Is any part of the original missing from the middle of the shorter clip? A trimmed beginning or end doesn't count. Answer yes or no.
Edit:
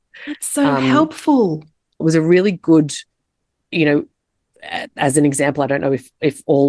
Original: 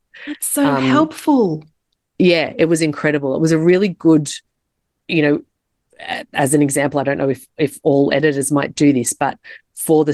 yes